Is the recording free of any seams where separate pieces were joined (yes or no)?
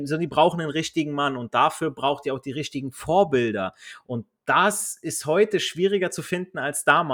yes